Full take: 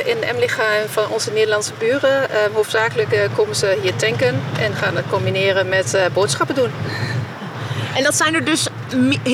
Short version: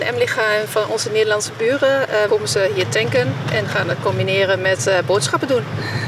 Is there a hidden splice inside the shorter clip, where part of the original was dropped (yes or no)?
yes